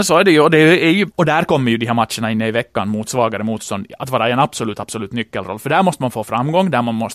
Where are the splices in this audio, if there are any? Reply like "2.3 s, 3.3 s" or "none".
1.1 s